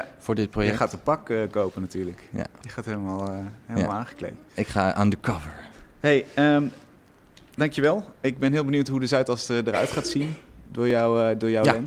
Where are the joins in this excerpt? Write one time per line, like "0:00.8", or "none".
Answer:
none